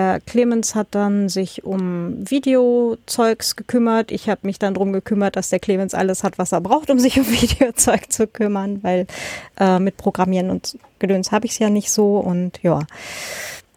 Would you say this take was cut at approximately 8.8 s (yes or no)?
no